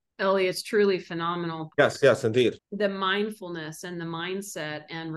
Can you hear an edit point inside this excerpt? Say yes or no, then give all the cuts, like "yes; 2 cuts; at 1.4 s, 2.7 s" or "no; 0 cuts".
yes; 1 cut; at 1.7 s